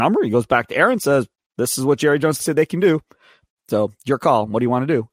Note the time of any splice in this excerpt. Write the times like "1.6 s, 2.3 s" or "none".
2.4 s